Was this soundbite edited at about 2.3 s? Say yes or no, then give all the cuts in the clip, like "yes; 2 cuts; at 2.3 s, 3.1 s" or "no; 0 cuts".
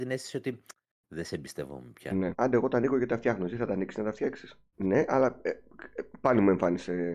yes; 2 cuts; at 2.3 s, 4.7 s